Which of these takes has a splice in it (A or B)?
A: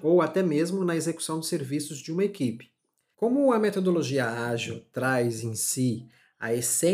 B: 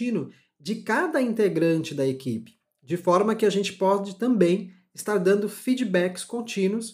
A